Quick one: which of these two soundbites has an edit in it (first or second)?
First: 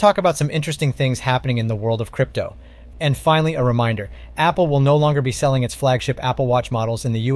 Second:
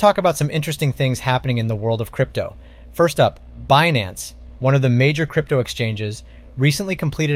first